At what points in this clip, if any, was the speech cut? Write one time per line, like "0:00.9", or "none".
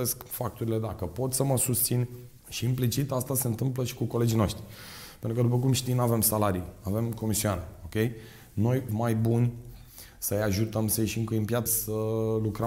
0:02.4
0:08.9
0:11.7